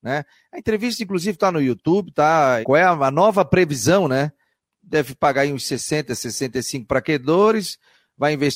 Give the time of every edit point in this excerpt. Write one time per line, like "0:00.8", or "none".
0:02.6
0:04.6